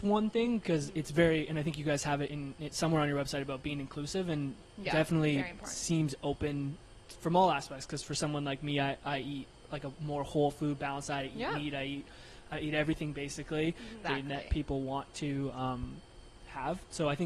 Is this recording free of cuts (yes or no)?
no